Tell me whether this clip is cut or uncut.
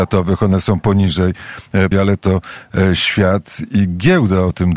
cut